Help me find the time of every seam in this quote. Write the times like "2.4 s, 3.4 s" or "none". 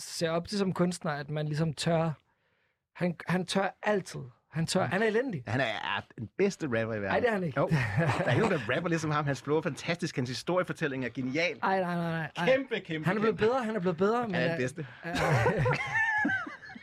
4.9 s